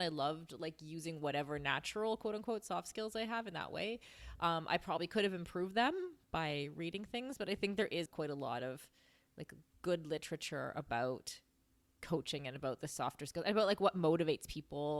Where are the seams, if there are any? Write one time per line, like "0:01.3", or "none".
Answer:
0:08.1